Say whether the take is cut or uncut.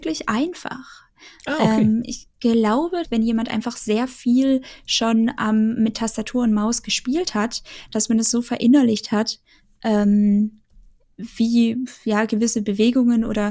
cut